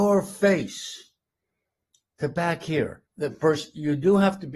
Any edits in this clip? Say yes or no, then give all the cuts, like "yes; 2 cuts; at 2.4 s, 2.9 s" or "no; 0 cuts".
yes; 1 cut; at 3.1 s